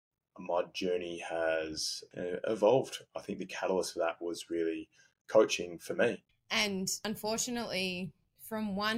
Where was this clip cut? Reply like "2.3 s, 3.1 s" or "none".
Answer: 6.3 s